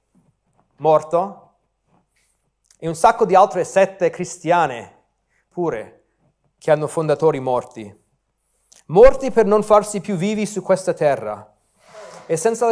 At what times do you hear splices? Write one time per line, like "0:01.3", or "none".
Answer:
none